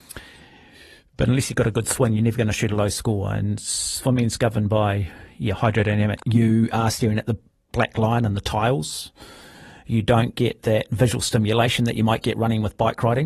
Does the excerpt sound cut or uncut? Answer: cut